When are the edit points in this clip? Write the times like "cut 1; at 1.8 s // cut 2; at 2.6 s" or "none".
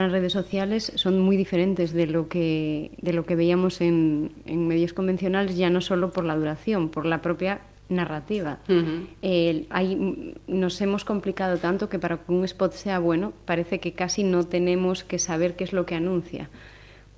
none